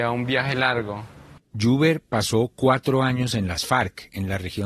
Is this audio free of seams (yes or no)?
no